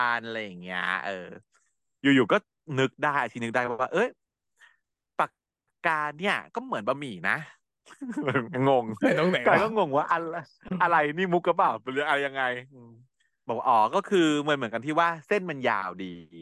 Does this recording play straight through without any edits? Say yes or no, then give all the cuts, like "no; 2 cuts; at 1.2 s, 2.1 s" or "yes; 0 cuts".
yes; 0 cuts